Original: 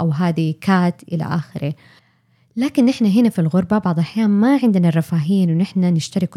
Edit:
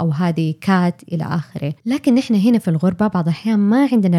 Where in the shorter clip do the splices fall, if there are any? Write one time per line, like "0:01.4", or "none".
0:01.8